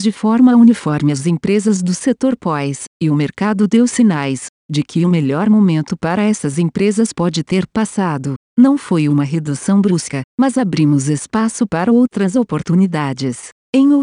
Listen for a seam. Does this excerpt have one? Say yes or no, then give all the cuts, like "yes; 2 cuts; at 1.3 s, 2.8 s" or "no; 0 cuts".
yes; 2 cuts; at 2.9 s, 10.3 s